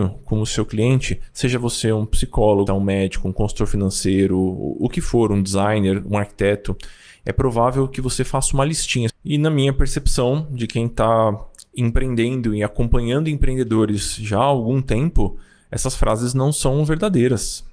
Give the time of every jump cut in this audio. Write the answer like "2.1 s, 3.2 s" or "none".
2.7 s, 9.1 s